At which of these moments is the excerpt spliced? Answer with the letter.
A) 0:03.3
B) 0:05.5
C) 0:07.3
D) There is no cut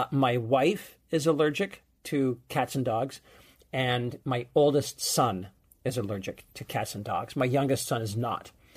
D